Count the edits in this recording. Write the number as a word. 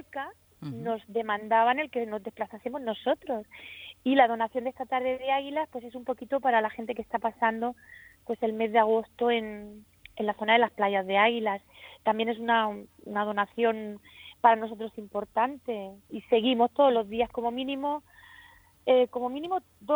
one